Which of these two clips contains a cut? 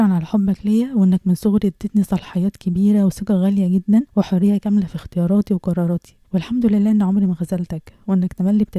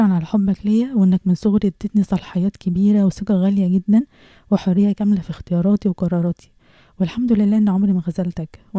first; 2 cuts; at 4.1 s, 6.2 s

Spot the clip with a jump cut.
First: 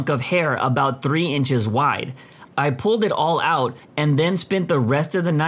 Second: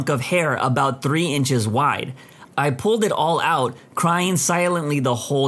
first; 1 cut; at 3.8 s

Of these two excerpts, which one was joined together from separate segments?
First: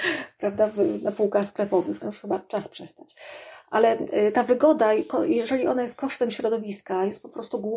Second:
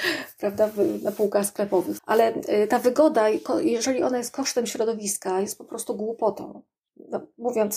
second; 1 cut; at 2.0 s

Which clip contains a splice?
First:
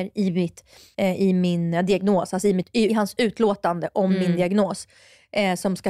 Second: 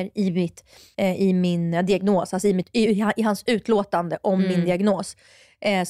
first; 1 cut; at 2.9 s

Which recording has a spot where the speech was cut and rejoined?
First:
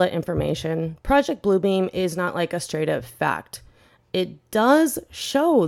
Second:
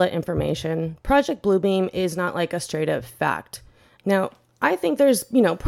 second; 1 cut; at 4.0 s

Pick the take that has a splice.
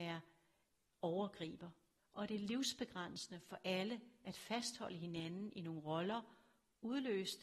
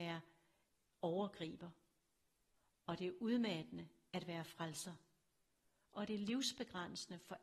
first; 1 cut; at 2.0 s

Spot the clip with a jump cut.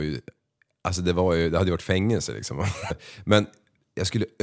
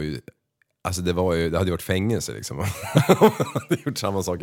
first; 1 cut; at 2.9 s

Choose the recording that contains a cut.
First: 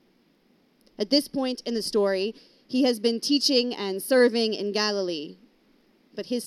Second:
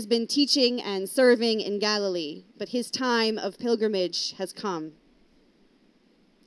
second; 1 cut; at 2.5 s

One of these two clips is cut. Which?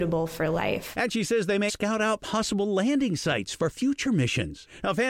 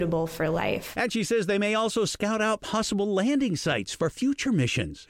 first; 1 cut; at 1.7 s

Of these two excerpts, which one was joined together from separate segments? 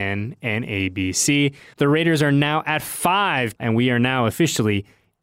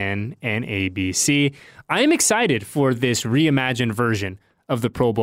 first; 2 cuts; at 1.7 s, 3.6 s

